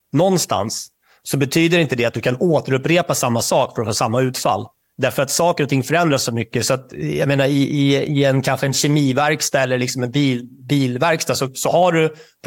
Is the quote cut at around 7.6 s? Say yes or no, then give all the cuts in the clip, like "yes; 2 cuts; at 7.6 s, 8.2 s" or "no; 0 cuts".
no; 0 cuts